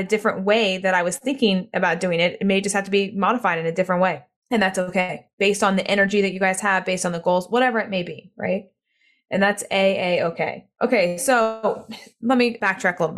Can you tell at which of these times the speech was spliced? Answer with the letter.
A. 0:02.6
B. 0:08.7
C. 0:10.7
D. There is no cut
C